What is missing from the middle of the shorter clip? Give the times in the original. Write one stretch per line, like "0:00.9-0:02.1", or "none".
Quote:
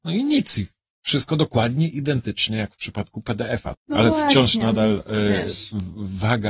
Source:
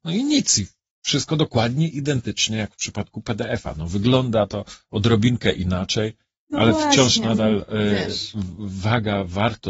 0:03.7-0:06.4